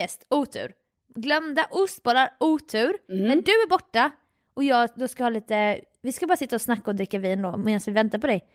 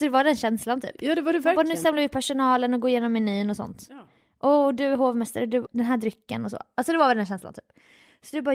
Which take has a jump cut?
second; 1 cut; at 5.7 s

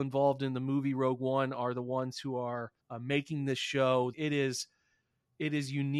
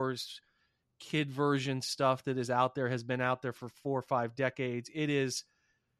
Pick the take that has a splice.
first; 2 cuts; at 2.8 s, 4.1 s

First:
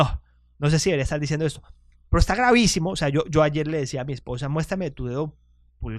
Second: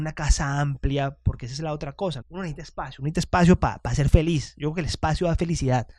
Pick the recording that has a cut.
second; 1 cut; at 2.2 s

